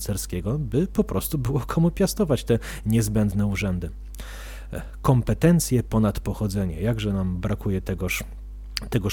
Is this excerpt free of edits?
yes; 0 cuts

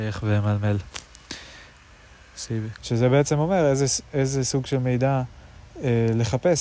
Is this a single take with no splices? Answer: no; 1 cut; at 2.8 s

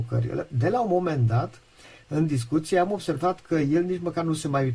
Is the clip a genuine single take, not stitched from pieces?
yes; 0 cuts

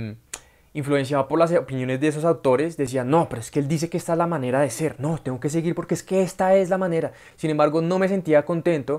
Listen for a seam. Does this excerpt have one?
no; 0 cuts

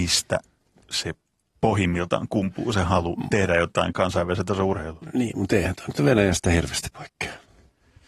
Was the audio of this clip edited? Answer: no; 0 cuts

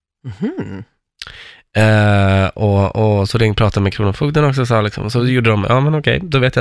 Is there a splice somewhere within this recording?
no; 0 cuts

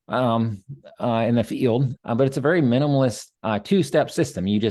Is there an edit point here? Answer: yes; 2 cuts; at 1.9 s, 3.3 s

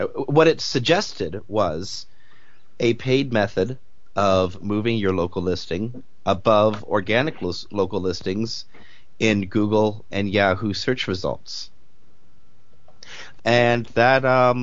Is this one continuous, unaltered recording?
no; 2 cuts; at 10.1 s, 13.4 s

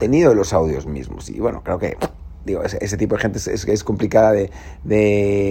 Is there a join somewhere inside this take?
no; 0 cuts

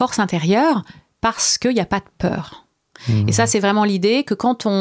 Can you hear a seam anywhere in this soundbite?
no; 0 cuts

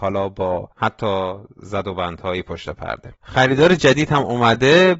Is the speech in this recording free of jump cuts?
no; 1 cut; at 3.2 s

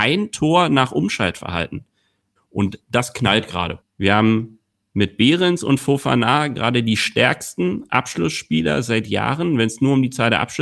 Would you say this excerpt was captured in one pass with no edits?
no; 2 cuts; at 2.4 s, 3.8 s

